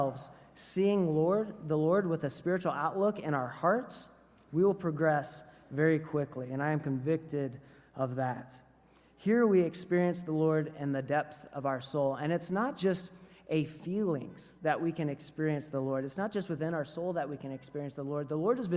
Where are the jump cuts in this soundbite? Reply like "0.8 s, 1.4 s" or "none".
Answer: none